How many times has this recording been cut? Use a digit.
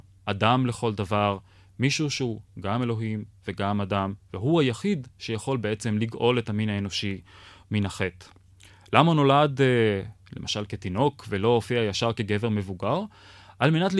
0